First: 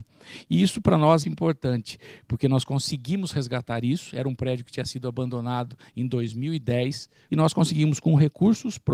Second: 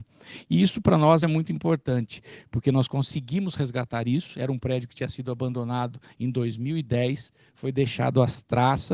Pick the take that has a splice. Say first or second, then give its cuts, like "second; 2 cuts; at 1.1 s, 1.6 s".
first; 2 cuts; at 1.2 s, 7.3 s